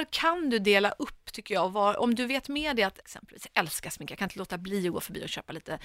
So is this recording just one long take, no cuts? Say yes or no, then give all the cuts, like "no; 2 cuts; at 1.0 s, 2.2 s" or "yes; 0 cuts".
no; 1 cut; at 3.0 s